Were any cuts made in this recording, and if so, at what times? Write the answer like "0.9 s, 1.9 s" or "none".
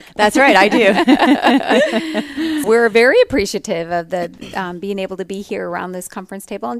2.6 s